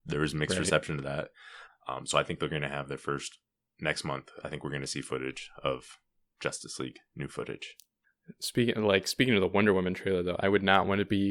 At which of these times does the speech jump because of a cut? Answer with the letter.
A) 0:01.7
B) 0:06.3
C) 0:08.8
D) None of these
A